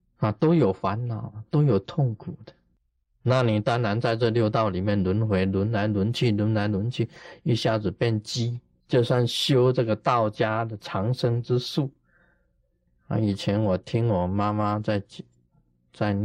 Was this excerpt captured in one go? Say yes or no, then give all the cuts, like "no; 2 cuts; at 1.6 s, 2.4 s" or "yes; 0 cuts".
no; 2 cuts; at 8.8 s, 12.9 s